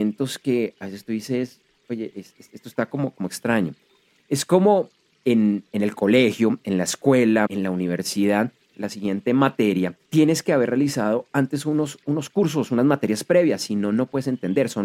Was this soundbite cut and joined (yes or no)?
yes